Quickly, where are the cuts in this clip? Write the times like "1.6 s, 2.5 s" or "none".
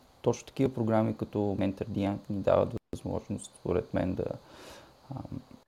none